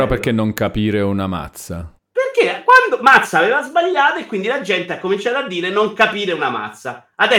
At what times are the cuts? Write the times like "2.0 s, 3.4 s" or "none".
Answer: 2.0 s